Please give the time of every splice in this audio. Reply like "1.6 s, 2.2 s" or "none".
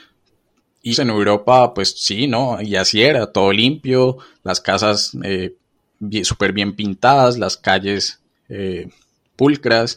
0.9 s